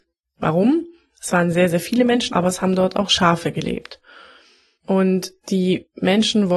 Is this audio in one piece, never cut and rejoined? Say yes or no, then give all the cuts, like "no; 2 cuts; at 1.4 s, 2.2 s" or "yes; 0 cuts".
no; 1 cut; at 2.3 s